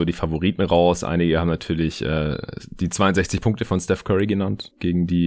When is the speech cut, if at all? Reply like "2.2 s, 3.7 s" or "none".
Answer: none